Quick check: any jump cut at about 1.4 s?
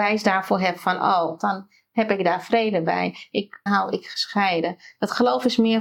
yes; 2 cuts; at 1.4 s, 3.7 s

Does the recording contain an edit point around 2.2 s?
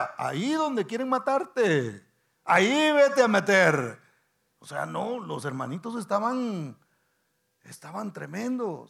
no; 1 cut; at 4.6 s

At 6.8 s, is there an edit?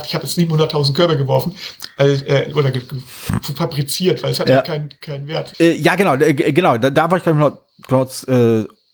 no; 1 cut; at 5.5 s

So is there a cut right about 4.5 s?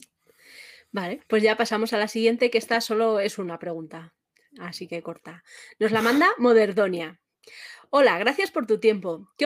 no; 0 cuts

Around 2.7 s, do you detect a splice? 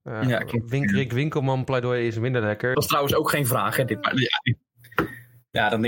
yes; 1 cut; at 2.7 s

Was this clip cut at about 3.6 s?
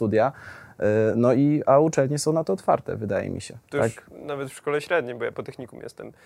yes; 1 cut; at 3.6 s

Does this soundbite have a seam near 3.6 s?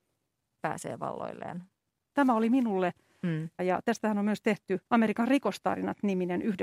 yes; 3 cuts; at 2.1 s, 3.6 s, 4.9 s

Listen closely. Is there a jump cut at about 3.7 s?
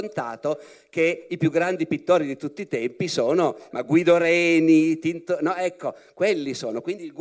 yes; 1 cut; at 3.7 s

